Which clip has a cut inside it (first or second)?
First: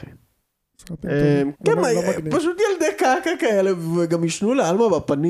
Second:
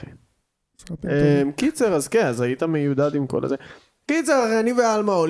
first